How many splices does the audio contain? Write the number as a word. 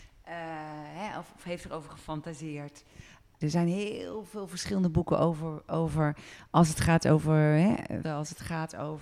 two